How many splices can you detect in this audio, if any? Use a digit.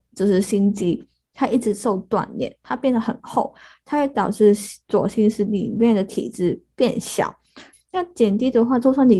1